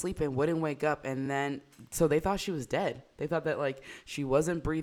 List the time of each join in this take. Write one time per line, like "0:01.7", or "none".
none